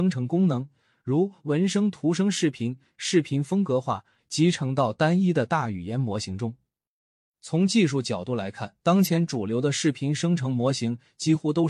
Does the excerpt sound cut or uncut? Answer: cut